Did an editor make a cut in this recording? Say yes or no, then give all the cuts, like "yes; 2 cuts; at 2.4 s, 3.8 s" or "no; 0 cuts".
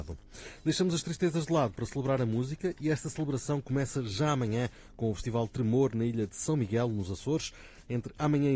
no; 0 cuts